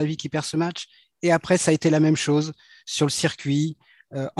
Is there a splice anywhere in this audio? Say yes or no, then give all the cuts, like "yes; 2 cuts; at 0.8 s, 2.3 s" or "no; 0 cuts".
yes; 1 cut; at 1.0 s